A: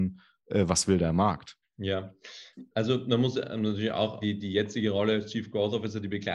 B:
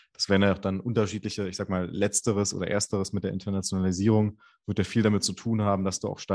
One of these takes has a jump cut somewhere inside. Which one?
A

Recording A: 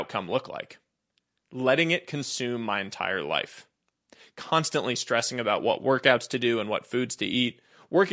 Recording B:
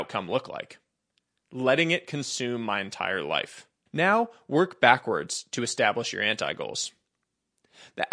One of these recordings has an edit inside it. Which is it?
B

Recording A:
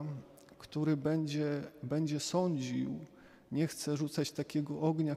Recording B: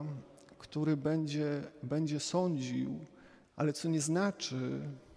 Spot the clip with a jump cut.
B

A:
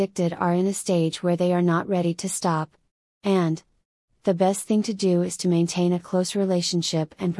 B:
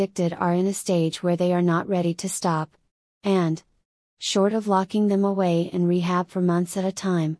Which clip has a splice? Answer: A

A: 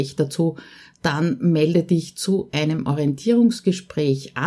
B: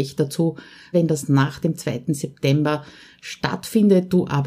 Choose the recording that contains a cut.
B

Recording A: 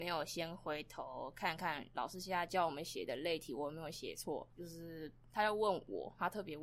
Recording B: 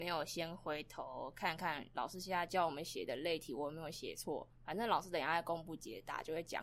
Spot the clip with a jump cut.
A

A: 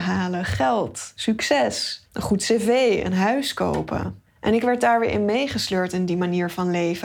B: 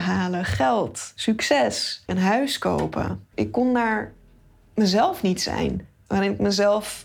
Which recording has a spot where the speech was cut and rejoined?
B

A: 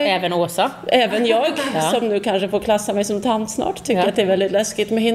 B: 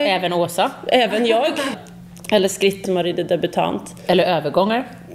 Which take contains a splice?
B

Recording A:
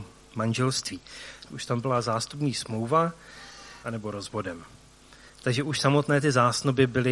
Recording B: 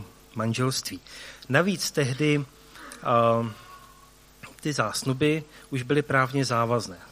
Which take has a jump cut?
A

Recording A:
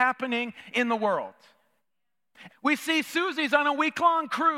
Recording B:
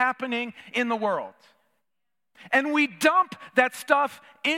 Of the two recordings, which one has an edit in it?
A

